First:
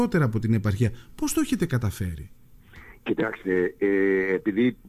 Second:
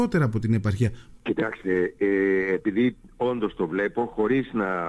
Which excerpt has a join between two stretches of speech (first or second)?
second